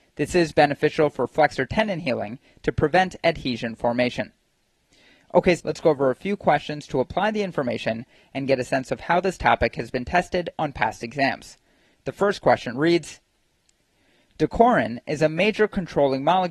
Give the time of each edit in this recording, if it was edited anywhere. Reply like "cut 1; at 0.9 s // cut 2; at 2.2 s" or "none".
cut 1; at 5.6 s